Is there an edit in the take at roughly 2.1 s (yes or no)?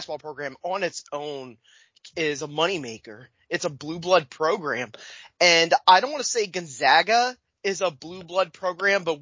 yes